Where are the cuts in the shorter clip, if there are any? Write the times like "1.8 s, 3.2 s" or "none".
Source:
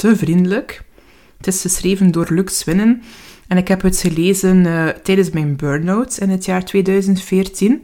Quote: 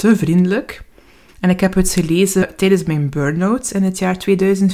1.3 s, 2.4 s